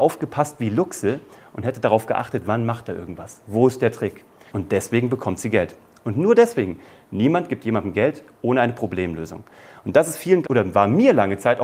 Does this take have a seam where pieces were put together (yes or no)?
yes